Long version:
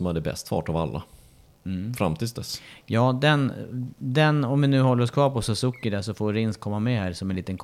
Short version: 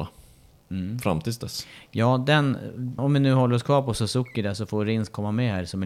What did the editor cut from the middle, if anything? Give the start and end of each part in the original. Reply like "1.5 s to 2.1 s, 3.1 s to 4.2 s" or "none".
3.9 s to 4.5 s